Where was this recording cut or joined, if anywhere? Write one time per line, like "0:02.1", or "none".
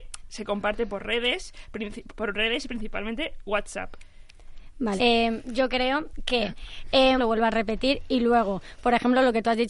0:05.0
0:07.2